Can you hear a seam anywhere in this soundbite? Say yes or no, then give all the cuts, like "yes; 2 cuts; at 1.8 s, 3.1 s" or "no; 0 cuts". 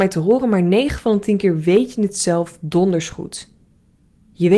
no; 0 cuts